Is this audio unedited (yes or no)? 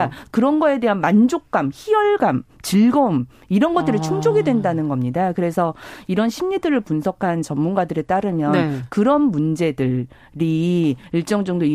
yes